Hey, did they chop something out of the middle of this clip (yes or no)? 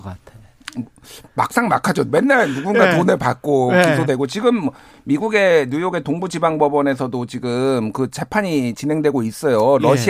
yes